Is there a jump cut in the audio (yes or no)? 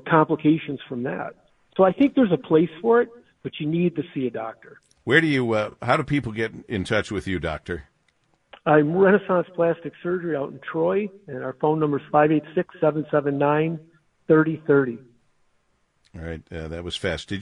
no